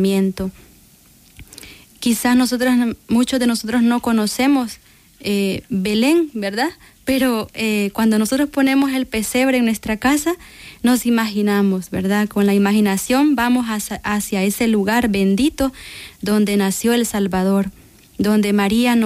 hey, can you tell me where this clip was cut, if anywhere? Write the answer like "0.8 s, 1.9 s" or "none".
none

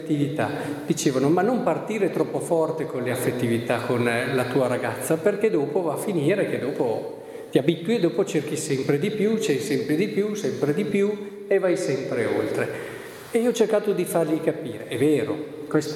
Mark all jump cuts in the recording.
none

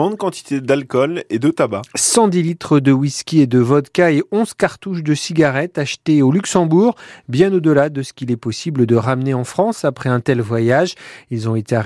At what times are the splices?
none

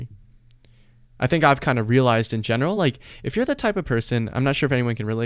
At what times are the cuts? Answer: none

